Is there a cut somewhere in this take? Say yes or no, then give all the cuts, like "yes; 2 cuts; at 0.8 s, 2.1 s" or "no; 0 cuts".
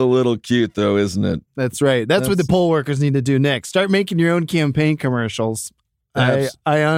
no; 0 cuts